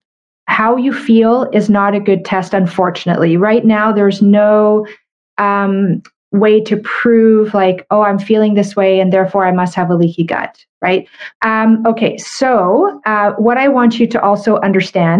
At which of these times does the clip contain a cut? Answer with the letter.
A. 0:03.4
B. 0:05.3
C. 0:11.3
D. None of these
C